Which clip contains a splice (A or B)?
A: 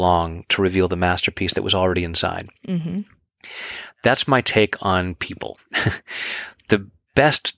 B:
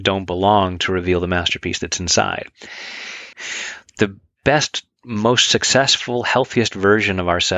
B